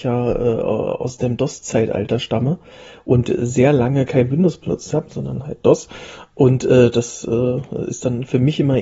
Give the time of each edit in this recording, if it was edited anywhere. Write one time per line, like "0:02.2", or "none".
none